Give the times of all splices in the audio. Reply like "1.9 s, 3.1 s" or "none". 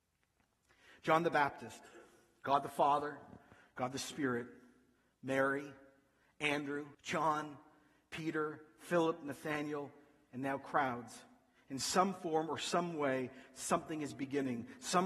6.9 s

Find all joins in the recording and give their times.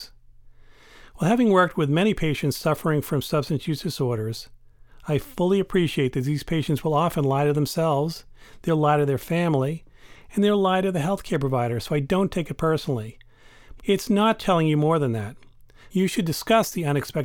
13.8 s, 15.9 s

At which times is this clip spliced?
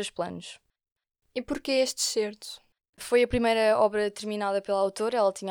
2.8 s

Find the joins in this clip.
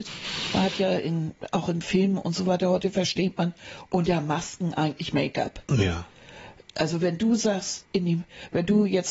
7.8 s

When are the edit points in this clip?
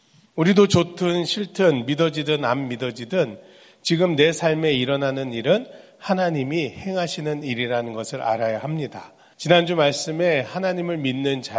9.3 s

